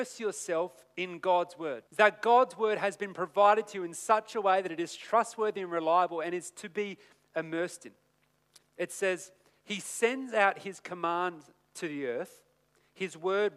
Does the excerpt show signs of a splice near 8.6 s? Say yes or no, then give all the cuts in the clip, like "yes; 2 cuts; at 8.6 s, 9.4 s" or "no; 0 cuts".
yes; 2 cuts; at 1.9 s, 8.6 s